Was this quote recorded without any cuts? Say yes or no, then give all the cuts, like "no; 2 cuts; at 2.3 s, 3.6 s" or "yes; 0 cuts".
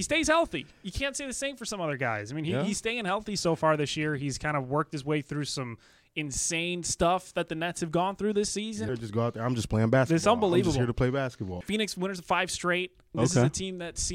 no; 3 cuts; at 8.9 s, 11.6 s, 13.1 s